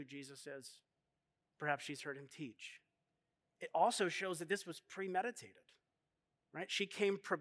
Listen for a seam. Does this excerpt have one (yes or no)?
yes